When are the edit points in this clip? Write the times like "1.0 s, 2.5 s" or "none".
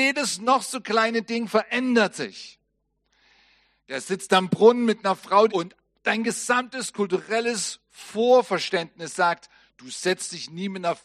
5.5 s